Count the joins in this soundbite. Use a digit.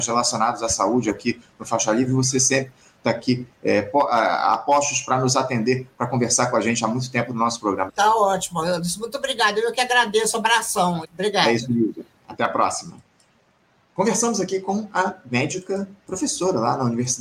2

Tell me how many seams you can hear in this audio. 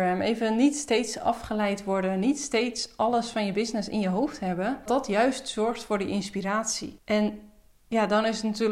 1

